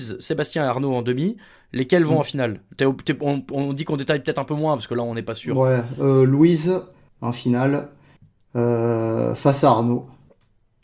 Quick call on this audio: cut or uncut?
uncut